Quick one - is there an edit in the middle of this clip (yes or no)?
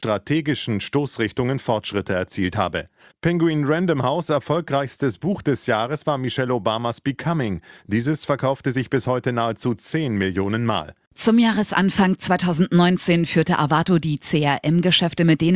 yes